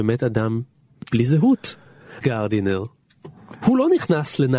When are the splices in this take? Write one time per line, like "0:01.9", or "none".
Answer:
0:02.2